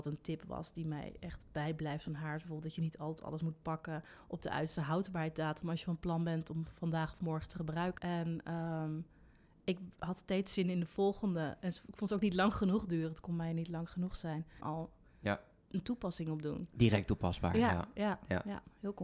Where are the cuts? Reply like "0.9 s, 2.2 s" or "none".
8.0 s, 14.6 s

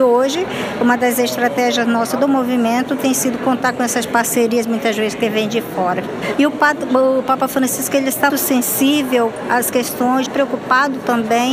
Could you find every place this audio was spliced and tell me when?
6.3 s, 8.3 s, 10.3 s

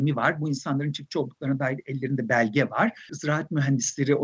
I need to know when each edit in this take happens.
3.1 s

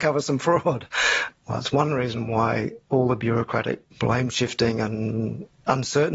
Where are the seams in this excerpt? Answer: 3.9 s

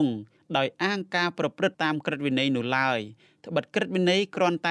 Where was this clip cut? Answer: 1.7 s

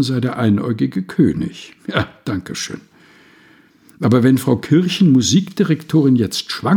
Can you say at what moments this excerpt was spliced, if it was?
none

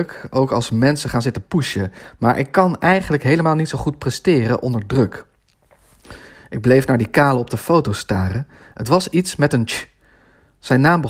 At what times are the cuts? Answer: none

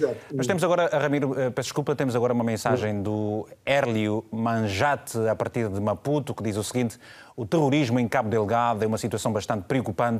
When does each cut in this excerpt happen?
none

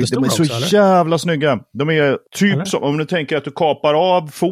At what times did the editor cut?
none

